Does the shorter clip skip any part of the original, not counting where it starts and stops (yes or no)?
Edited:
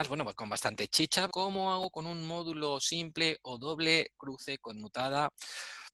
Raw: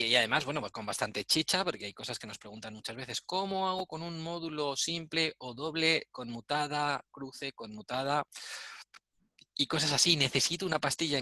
yes